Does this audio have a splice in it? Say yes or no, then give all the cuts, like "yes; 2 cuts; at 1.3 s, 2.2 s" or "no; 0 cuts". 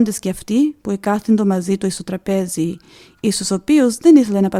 no; 0 cuts